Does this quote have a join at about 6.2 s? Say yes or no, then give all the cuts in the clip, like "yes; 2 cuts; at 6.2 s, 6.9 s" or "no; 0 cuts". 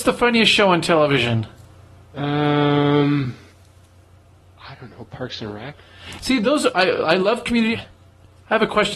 no; 1 cut; at 7.7 s